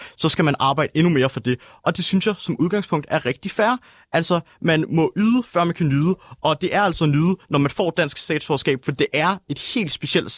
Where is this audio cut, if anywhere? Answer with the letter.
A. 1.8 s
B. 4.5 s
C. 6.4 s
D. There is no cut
D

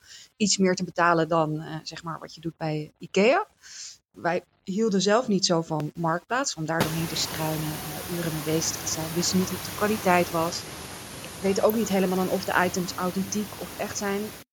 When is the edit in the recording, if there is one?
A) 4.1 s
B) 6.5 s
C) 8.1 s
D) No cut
A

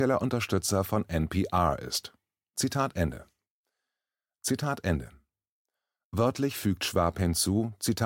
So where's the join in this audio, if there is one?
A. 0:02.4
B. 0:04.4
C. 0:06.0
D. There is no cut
B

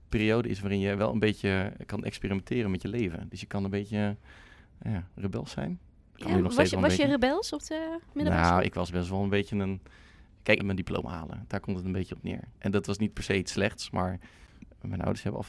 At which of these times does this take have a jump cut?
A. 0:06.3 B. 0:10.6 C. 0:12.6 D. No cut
B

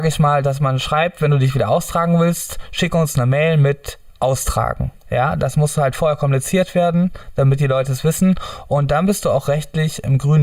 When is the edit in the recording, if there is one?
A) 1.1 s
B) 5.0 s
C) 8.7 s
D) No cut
B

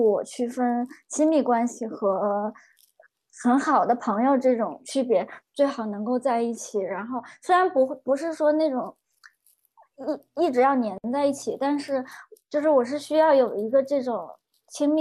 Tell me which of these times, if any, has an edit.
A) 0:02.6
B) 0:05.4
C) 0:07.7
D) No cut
B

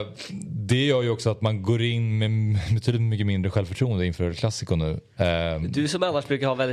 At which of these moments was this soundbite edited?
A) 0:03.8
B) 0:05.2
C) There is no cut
C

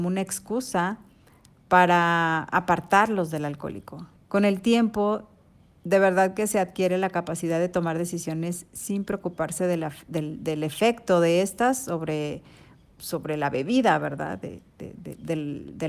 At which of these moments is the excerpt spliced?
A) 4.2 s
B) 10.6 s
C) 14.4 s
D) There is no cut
A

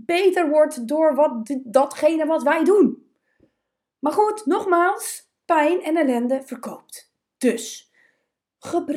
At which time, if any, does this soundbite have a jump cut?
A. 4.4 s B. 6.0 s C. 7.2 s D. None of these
D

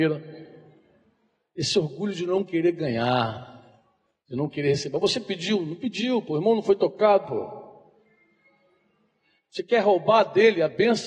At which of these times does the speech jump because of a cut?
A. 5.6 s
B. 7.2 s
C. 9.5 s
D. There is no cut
B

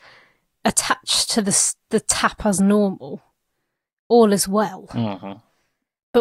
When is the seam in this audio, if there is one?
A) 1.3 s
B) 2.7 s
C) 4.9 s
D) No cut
D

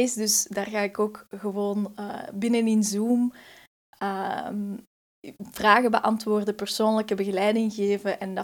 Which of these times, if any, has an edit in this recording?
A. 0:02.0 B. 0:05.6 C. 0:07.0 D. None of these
D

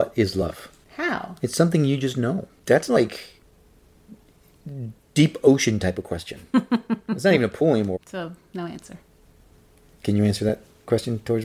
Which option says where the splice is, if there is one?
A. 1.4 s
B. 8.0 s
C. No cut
B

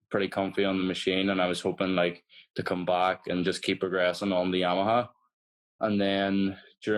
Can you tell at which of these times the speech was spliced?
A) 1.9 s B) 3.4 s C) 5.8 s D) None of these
C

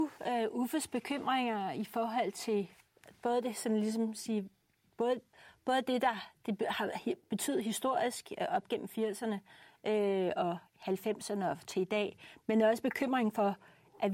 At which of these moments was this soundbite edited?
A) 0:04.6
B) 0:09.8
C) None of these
C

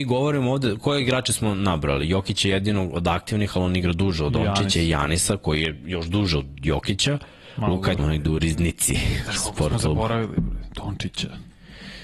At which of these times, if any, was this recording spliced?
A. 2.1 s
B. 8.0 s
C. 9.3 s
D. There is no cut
B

